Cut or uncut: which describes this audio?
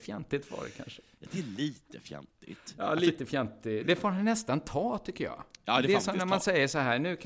uncut